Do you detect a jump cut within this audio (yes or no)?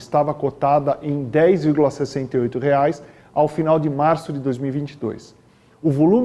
no